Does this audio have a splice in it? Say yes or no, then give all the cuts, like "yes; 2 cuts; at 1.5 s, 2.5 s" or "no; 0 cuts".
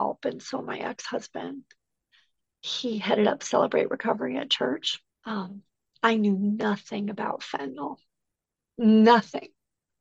yes; 1 cut; at 5.1 s